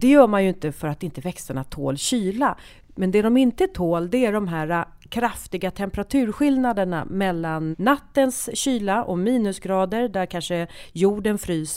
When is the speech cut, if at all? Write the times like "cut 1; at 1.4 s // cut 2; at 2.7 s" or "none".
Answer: cut 1; at 7.7 s